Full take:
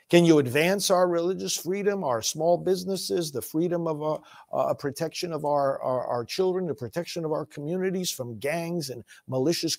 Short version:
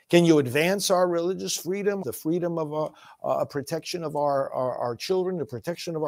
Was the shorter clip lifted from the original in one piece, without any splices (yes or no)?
no